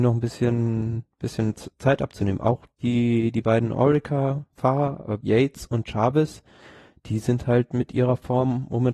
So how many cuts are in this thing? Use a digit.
2